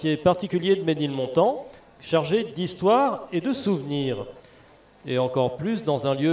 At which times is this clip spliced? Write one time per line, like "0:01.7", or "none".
none

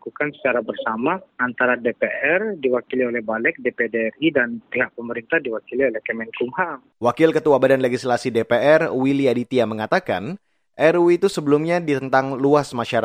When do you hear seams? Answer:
0:06.9

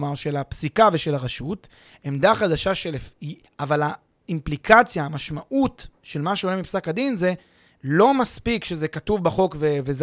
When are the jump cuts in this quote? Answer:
0:03.4

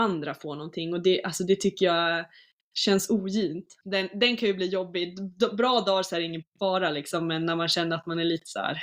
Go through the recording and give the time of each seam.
0:03.8

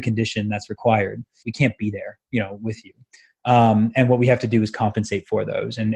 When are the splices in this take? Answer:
0:01.4

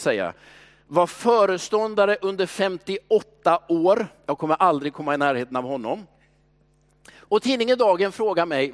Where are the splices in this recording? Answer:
none

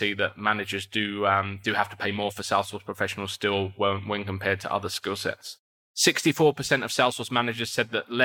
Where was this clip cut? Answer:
none

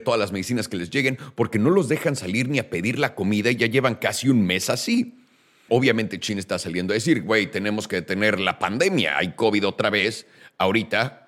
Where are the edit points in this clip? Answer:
0:05.7

